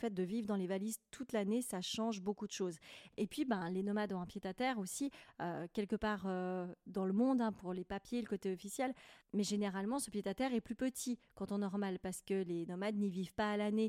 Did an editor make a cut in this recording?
no; 0 cuts

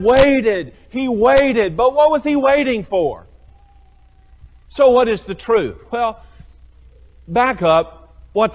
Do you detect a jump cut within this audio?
yes; 1 cut; at 4.6 s

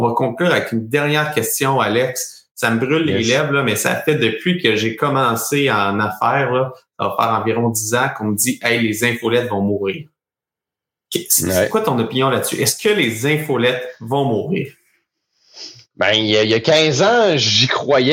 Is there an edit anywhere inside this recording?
no; 0 cuts

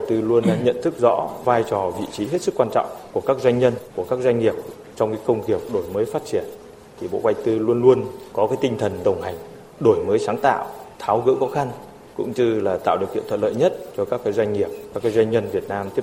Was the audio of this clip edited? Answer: no; 0 cuts

